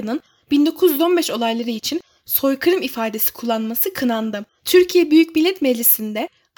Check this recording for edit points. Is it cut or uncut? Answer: cut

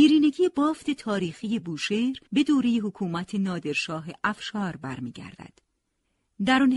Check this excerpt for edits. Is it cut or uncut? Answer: cut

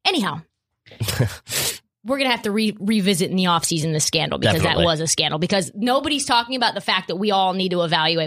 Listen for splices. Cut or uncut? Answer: uncut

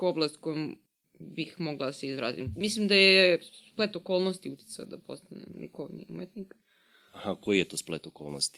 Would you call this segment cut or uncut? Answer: uncut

